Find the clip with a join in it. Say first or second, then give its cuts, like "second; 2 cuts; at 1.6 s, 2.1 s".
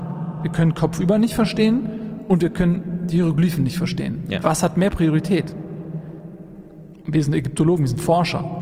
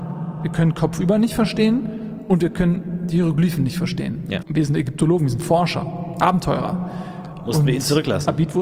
second; 1 cut; at 4.4 s